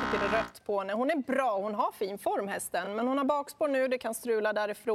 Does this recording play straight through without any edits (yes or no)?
yes